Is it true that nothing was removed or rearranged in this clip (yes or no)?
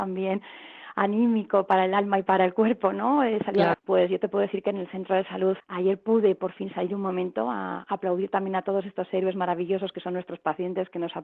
no